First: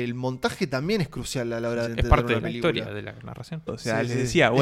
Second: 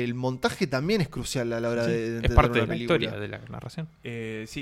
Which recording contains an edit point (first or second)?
first